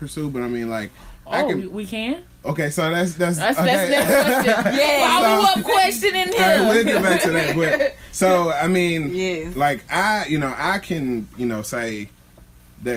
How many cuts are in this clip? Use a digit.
0